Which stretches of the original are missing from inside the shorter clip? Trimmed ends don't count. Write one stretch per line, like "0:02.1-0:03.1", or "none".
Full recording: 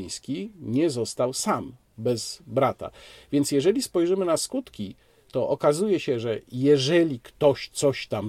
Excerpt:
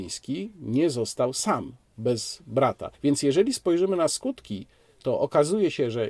0:03.0-0:03.2